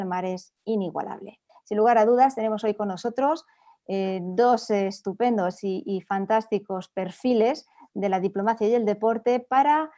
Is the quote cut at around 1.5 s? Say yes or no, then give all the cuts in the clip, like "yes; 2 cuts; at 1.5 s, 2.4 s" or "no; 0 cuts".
yes; 1 cut; at 1.5 s